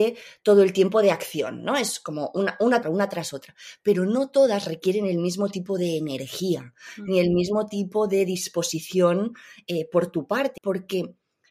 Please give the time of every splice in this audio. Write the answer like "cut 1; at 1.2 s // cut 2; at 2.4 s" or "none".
cut 1; at 2.8 s // cut 2; at 10.6 s